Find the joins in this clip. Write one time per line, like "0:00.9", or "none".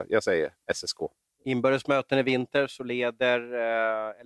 none